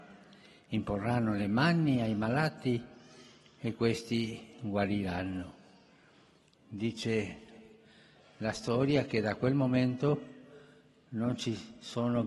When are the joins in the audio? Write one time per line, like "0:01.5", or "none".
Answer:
none